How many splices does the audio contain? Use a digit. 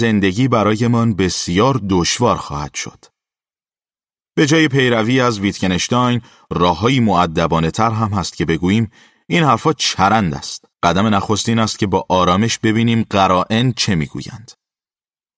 1